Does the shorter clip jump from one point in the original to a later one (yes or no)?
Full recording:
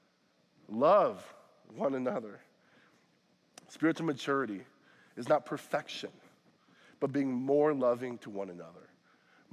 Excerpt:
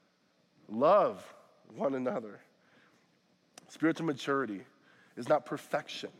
no